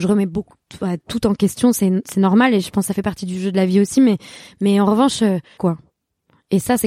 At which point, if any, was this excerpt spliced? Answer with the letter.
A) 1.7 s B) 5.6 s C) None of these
B